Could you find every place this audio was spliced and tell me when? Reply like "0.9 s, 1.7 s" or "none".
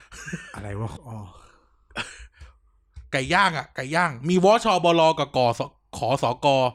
1.0 s